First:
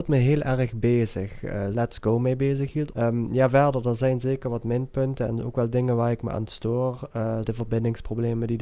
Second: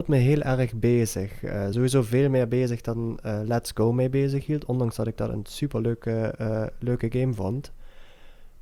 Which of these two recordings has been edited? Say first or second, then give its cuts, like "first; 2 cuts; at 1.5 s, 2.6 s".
first; 3 cuts; at 1.7 s, 2.9 s, 7.4 s